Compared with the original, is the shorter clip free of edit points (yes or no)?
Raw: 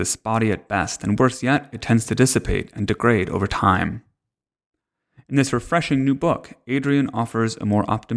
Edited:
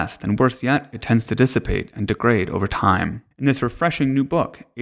no